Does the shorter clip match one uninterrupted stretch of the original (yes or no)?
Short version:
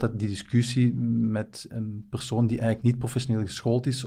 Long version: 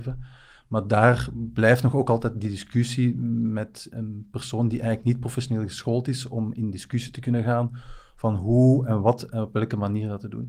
yes